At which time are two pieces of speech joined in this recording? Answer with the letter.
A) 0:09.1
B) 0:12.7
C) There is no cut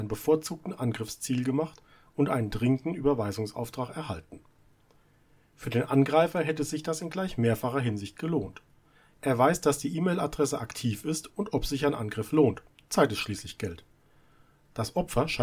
C